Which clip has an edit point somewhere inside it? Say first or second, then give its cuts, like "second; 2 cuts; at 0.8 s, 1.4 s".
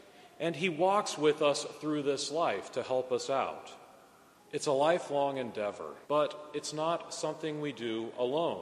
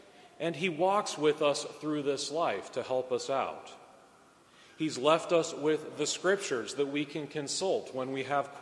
first; 2 cuts; at 4.4 s, 6.0 s